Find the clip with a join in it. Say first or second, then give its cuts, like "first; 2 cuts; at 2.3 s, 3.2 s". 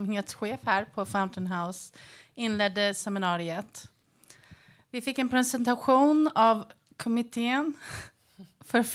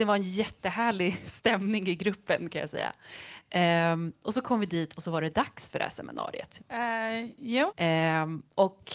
second; 2 cuts; at 6.6 s, 7.7 s